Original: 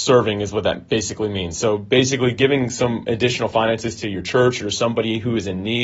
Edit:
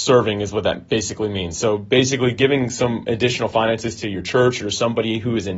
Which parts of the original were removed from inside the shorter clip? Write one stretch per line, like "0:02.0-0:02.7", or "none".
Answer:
none